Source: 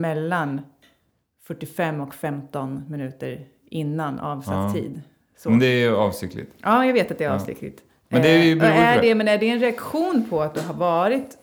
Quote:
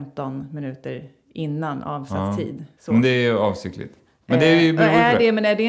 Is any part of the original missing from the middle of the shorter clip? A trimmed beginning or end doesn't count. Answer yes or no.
yes